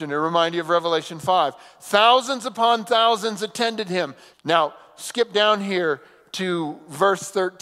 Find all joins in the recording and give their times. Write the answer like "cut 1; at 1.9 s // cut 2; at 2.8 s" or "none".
cut 1; at 4.3 s